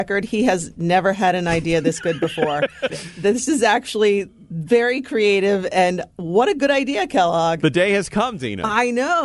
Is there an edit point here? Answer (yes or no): yes